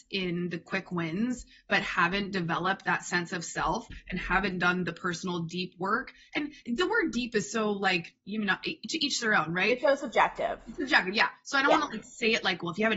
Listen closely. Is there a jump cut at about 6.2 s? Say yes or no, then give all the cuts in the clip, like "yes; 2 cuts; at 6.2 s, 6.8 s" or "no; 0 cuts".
no; 0 cuts